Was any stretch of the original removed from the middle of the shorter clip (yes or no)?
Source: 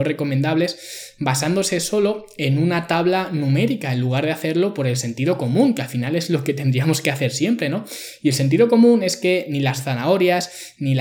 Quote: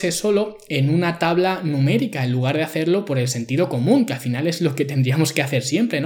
no